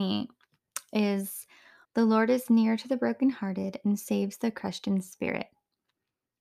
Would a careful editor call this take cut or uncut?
cut